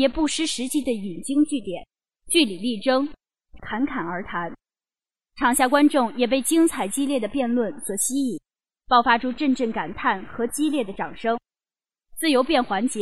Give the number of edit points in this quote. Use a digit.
1